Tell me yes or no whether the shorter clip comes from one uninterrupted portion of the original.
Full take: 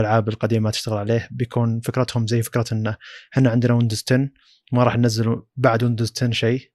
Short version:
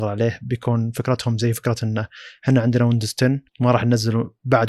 no